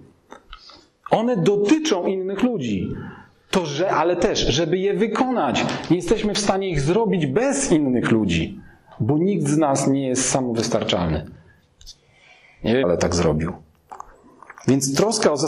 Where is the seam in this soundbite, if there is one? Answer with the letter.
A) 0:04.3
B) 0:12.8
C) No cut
B